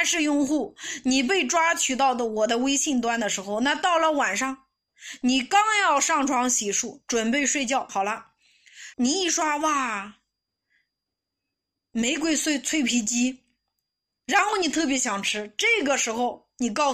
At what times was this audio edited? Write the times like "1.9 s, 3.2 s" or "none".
7.9 s, 8.9 s